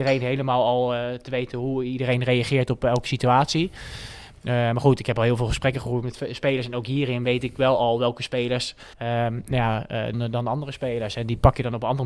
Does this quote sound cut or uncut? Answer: cut